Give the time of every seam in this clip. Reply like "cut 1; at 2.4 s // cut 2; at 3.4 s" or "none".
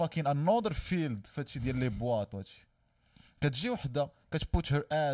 none